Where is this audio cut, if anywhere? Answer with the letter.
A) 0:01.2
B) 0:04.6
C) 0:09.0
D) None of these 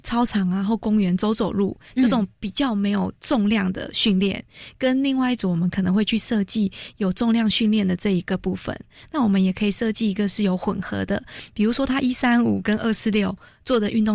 D